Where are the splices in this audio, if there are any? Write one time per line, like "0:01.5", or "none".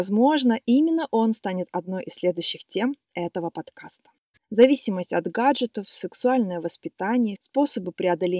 0:04.4
0:07.4